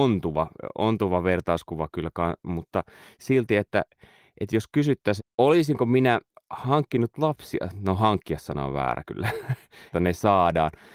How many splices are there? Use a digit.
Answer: 2